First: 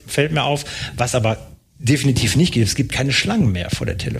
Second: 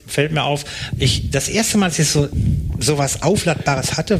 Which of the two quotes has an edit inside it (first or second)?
second